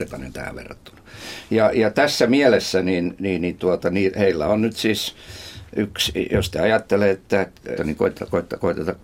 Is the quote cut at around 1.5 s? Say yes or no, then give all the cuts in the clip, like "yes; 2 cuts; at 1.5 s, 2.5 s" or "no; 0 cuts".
no; 1 cut; at 7.8 s